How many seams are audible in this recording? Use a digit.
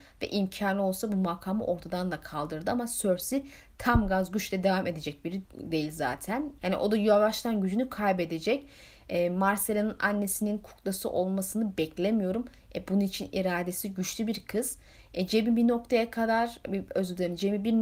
2